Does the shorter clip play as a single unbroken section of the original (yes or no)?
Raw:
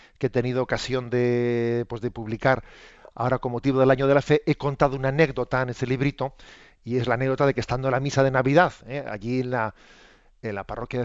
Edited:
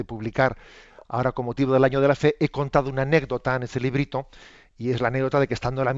yes